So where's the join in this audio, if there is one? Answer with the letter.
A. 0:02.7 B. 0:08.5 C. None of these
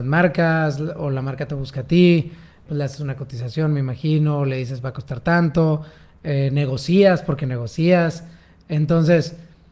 A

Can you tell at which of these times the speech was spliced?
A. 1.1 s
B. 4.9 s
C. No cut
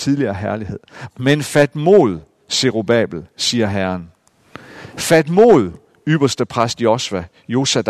A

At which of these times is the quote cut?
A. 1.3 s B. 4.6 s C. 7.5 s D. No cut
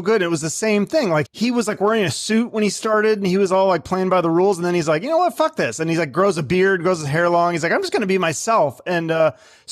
A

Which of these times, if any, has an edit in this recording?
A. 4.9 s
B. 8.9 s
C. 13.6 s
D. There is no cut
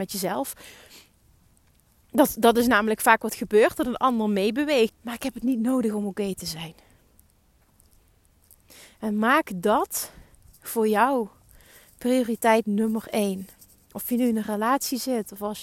A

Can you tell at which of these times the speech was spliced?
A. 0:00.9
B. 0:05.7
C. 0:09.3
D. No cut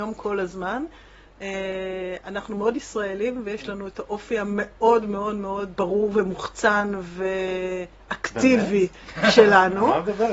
B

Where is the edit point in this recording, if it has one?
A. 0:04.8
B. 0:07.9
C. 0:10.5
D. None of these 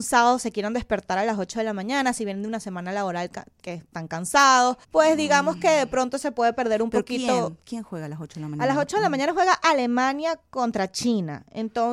A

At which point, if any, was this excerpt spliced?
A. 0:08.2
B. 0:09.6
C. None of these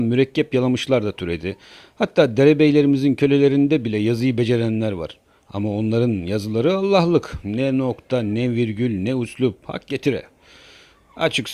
C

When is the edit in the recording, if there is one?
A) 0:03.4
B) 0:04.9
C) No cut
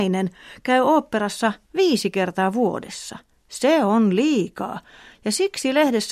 C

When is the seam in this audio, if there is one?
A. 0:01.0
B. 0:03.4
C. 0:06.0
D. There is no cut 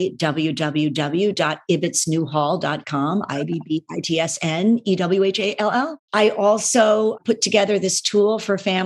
C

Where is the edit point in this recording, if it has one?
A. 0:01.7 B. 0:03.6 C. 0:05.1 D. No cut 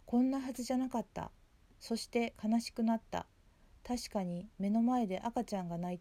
A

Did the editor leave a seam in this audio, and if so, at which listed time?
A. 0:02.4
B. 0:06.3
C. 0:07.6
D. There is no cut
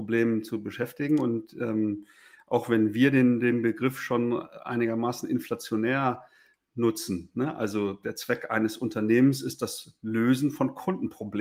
D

